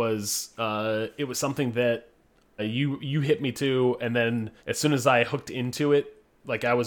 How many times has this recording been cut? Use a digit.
2